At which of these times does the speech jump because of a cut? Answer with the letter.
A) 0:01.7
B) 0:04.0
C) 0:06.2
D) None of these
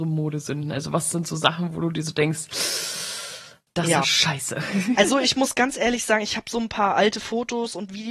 B